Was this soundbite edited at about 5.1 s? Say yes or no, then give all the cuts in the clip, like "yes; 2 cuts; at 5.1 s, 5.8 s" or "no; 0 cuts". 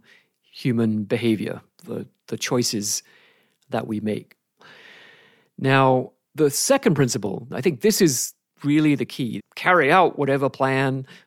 no; 2 cuts; at 7.5 s, 9.4 s